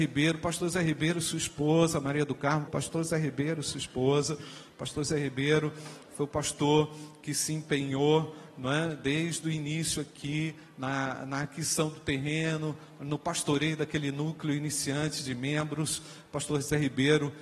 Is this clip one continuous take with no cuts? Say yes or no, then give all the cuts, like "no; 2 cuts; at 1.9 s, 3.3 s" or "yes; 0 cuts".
no; 1 cut; at 2.7 s